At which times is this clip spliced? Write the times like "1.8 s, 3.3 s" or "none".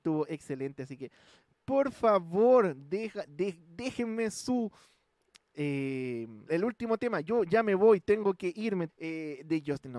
6.5 s, 8.9 s

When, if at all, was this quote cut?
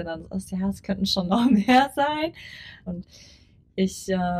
2.9 s

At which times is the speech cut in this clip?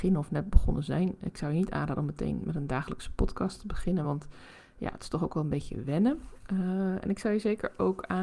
none

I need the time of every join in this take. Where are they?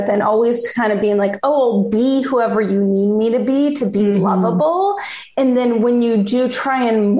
none

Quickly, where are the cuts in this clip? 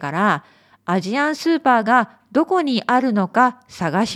none

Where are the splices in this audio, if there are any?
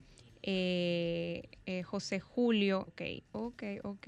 2.9 s

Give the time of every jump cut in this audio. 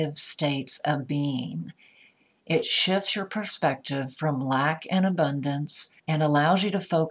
6.0 s

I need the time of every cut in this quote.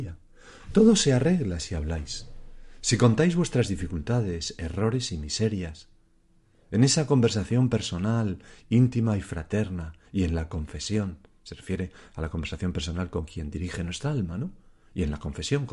none

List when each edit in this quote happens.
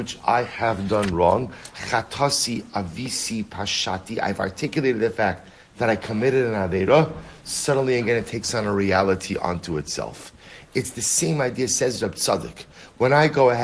none

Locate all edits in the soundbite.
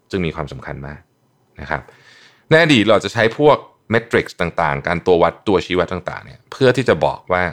none

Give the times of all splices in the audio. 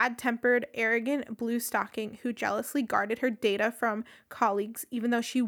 none

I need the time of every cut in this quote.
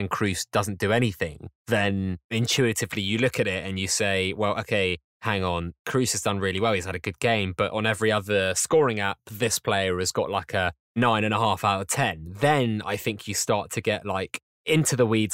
none

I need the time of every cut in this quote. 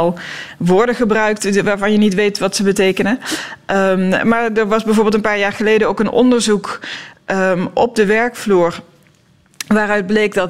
none

